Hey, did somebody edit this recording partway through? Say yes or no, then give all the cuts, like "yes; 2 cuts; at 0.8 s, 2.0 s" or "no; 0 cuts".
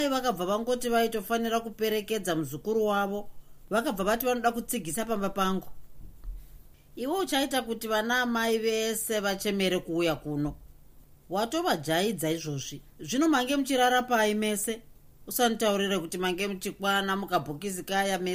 yes; 1 cut; at 12.9 s